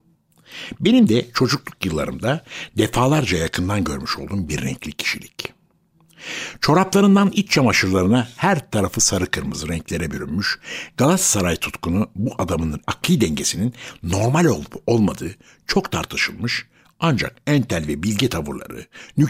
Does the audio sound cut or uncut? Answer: uncut